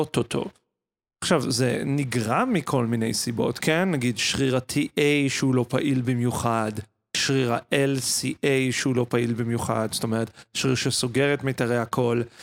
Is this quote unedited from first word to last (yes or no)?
yes